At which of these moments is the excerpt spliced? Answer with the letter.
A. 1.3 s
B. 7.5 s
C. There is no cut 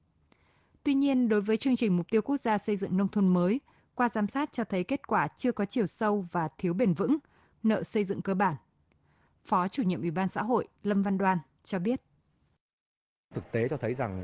B